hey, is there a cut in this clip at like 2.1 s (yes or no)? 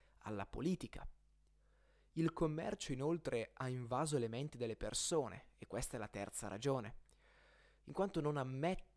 no